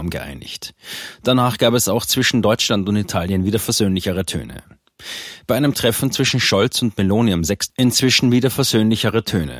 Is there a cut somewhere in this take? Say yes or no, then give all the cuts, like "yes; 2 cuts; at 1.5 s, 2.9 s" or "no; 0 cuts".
yes; 1 cut; at 7.7 s